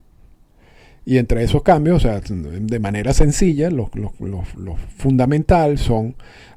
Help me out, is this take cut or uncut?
uncut